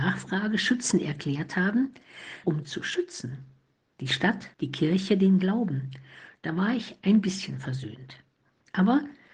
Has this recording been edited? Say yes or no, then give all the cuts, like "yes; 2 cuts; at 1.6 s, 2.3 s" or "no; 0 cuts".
yes; 2 cuts; at 2.4 s, 4.5 s